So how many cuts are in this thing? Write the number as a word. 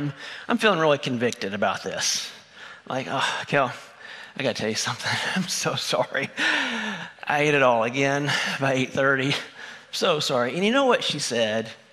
zero